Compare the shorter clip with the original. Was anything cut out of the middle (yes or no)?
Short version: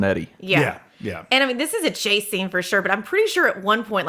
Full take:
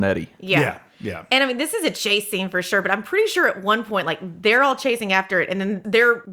no